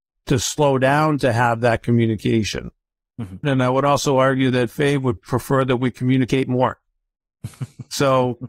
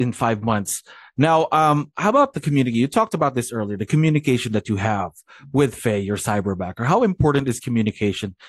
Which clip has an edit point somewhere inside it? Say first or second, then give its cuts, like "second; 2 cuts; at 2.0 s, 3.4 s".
first; 2 cuts; at 3.4 s, 5.2 s